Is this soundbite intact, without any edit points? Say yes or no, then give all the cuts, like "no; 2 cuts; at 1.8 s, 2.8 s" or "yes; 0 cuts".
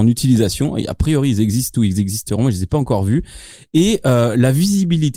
yes; 0 cuts